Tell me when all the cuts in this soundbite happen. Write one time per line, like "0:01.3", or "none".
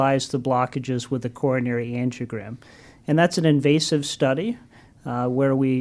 none